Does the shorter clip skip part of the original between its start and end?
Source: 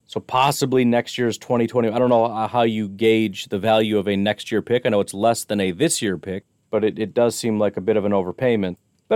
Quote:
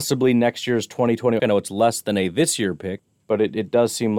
yes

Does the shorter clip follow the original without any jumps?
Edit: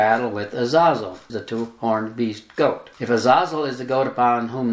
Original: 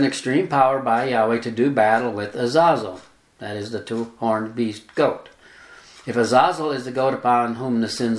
no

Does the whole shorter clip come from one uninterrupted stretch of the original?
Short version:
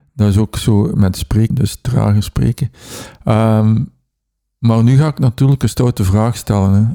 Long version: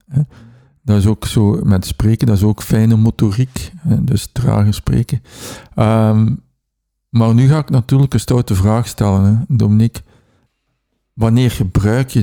no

